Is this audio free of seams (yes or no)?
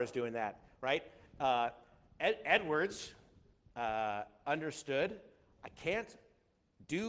yes